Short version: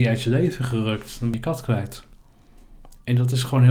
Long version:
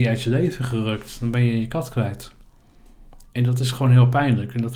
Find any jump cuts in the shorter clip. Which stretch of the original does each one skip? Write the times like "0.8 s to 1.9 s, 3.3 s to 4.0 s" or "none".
1.3 s to 1.6 s